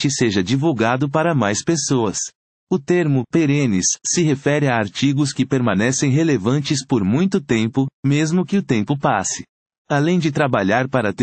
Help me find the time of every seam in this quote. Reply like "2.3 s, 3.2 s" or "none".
2.5 s, 9.8 s